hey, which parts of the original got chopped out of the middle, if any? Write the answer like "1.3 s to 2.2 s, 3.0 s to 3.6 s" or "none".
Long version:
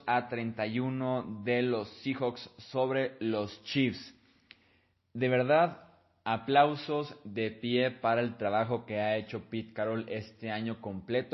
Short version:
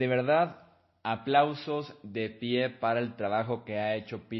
none

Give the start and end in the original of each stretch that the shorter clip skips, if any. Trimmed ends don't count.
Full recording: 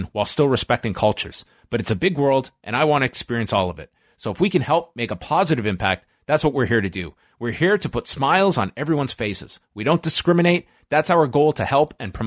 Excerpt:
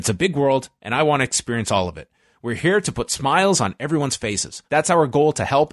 4.1 s to 7.3 s, 9.6 s to 10.9 s

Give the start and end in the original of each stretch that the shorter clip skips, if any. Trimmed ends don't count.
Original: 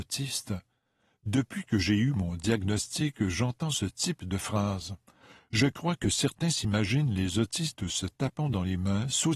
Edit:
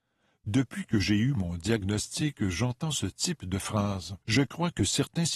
5.0 s to 5.5 s

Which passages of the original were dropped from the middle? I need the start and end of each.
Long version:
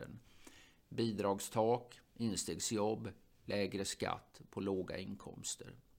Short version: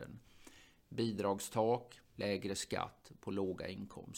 2.0 s to 3.3 s

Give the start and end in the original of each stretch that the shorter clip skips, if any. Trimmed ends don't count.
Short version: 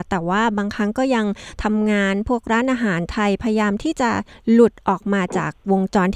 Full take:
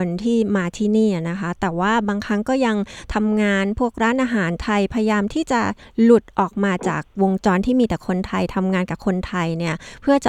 none

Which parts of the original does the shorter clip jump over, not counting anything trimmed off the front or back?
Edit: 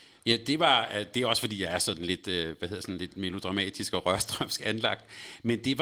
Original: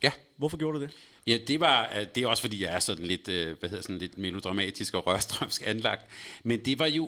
none

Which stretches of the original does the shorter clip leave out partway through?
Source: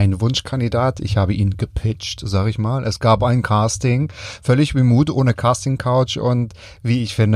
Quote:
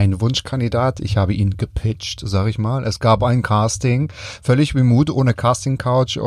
none

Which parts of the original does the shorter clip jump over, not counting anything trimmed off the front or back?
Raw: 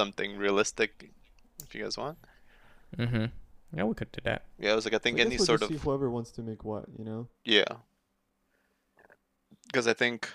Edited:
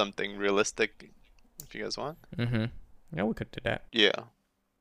2.2 s to 2.9 s, 4.5 s to 7.4 s

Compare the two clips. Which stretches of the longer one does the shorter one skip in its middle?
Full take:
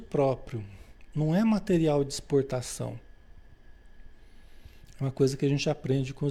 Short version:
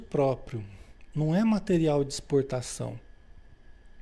none

